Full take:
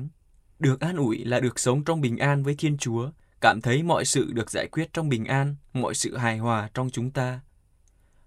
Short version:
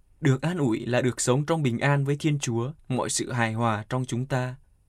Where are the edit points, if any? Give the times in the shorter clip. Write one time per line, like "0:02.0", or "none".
0:02.8

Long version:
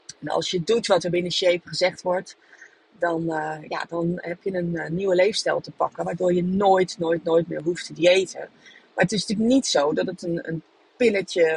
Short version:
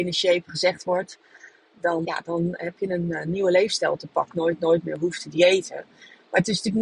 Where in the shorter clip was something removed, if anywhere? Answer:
0:02.0
0:04.3

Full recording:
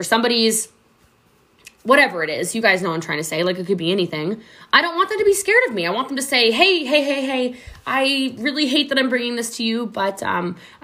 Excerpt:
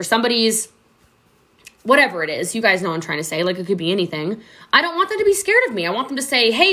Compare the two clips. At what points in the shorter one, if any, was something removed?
none

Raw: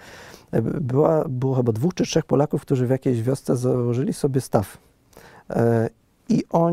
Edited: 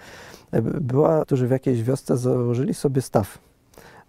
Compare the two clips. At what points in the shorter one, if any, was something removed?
0:01.2

